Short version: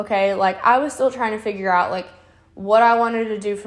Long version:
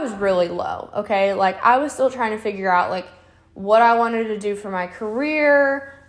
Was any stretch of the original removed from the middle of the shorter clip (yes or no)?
no